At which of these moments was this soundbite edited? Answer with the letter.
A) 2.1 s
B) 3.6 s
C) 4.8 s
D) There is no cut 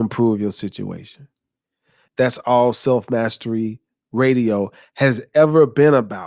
A